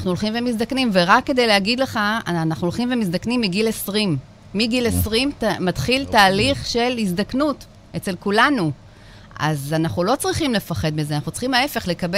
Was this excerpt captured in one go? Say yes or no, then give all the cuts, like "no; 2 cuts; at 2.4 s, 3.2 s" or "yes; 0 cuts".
yes; 0 cuts